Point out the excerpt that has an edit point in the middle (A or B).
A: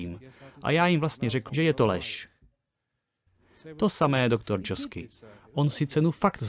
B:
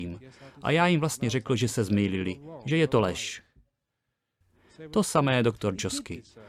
A